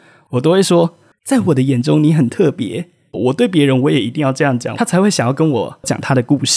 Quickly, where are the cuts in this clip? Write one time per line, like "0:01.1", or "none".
0:03.1
0:04.7